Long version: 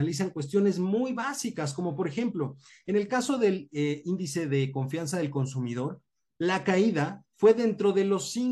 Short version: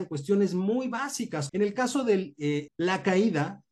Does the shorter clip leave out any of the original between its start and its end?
yes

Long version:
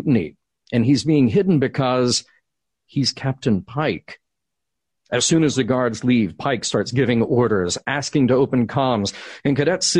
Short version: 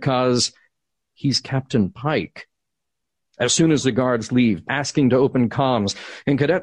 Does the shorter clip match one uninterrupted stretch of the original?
no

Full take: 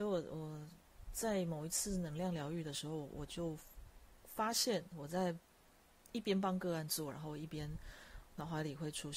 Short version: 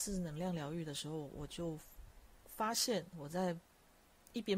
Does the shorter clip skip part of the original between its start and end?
no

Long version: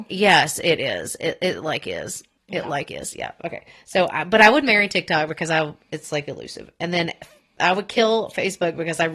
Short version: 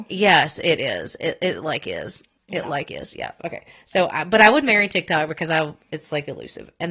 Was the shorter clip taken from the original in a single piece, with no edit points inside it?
yes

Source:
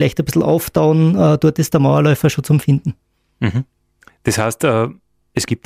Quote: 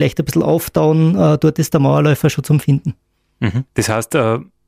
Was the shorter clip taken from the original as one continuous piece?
no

